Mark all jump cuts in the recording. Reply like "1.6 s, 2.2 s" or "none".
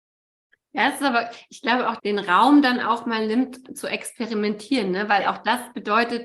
2.0 s